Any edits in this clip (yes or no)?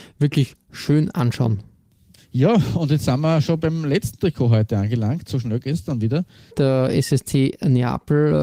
yes